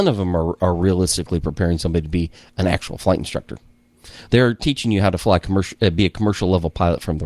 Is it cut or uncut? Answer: uncut